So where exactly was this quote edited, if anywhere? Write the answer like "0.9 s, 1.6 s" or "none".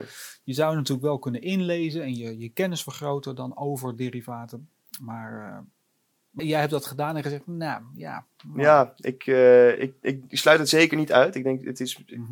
6.4 s